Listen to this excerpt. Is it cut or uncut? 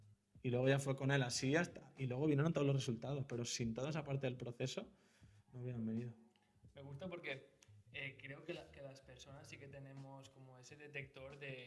uncut